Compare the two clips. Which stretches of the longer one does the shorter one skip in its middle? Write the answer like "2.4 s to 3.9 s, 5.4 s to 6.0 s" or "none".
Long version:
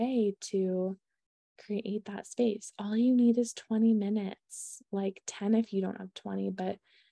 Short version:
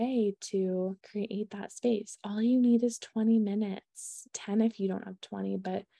1.0 s to 1.5 s, 4.8 s to 5.2 s